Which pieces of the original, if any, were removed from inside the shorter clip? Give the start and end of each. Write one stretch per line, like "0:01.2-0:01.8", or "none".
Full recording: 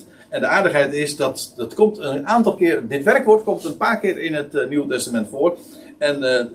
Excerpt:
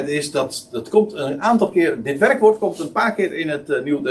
none